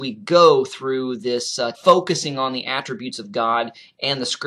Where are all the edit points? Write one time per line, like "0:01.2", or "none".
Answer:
0:01.7